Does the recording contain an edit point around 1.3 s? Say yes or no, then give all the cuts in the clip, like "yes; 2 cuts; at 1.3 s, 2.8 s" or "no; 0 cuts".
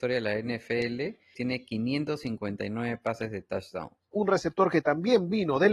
yes; 2 cuts; at 1.3 s, 4.1 s